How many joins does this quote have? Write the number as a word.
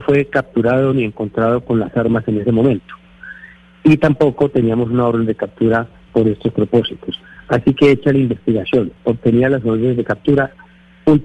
zero